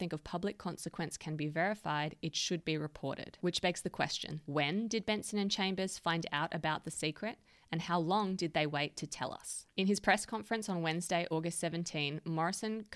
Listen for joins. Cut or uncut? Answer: uncut